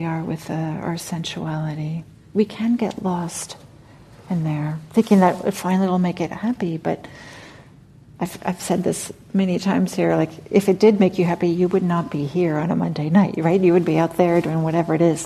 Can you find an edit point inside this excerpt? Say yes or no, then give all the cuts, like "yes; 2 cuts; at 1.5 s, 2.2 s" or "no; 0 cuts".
no; 0 cuts